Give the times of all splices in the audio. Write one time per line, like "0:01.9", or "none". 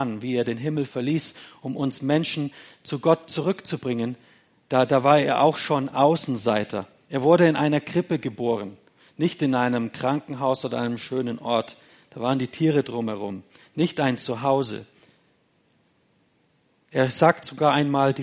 none